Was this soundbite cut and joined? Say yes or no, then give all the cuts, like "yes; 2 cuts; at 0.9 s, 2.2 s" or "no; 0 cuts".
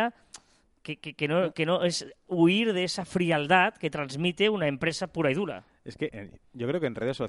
yes; 1 cut; at 6.1 s